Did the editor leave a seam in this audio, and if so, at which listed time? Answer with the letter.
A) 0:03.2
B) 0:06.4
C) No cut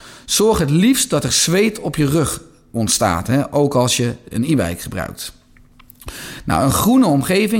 B